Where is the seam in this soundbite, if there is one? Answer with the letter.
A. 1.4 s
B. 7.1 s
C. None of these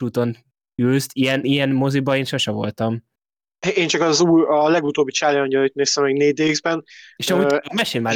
A